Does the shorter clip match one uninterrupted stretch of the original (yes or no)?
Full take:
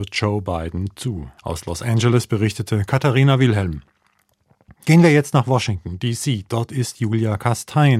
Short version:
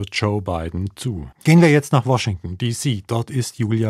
no